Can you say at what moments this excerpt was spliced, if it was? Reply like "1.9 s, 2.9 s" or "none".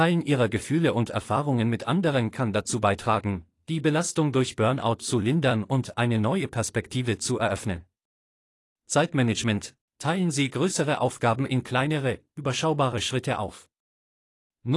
9.8 s